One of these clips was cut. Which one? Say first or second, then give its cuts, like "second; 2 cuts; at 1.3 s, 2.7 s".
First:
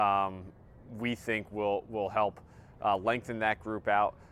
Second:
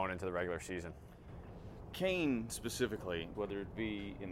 second; 1 cut; at 3.3 s